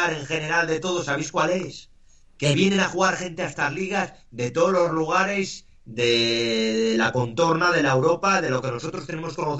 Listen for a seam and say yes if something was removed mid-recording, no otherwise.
no